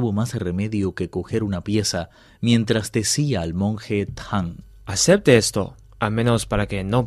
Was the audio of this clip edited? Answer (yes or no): no